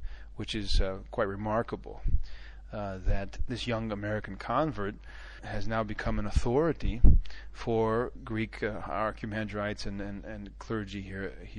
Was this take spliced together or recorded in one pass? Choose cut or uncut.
uncut